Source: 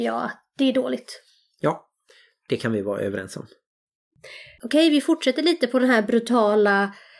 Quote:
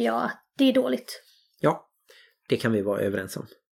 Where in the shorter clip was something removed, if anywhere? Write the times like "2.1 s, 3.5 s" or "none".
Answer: none